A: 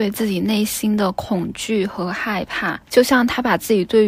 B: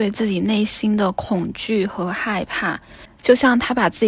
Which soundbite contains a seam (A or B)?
A